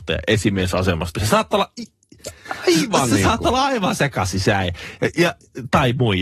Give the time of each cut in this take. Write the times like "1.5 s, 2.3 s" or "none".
1.1 s